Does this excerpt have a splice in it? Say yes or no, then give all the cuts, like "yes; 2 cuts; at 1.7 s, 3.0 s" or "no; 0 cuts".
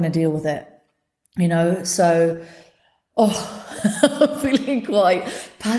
no; 0 cuts